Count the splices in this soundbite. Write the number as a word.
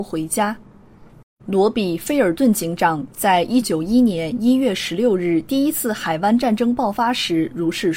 two